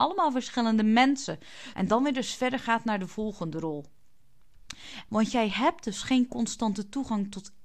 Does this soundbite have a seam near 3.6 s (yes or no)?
no